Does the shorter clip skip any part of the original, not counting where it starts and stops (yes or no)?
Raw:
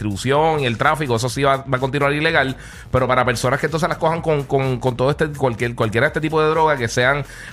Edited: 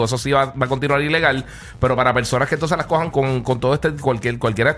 yes